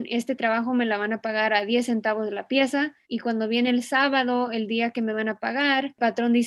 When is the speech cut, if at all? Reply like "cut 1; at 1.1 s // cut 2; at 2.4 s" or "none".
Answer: cut 1; at 3.0 s